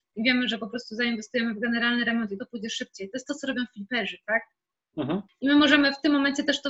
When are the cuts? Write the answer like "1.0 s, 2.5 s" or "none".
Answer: 5.3 s